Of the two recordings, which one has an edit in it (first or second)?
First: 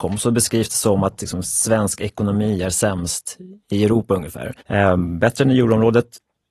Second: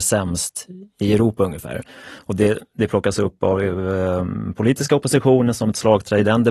first